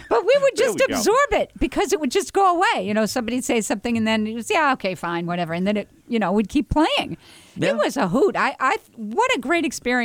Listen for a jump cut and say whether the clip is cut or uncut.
cut